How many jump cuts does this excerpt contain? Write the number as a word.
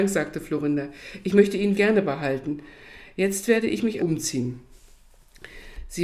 two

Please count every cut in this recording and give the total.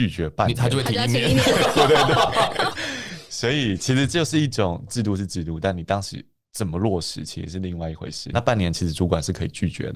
two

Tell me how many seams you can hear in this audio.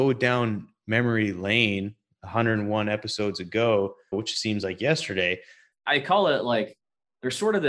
two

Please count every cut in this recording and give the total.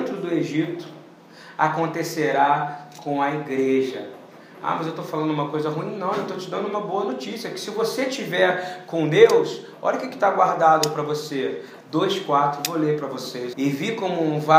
two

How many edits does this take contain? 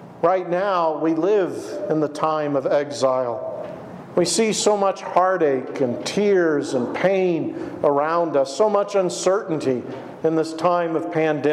zero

